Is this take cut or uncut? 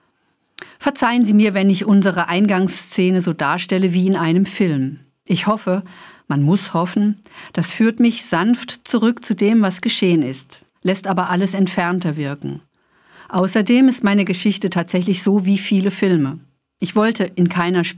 uncut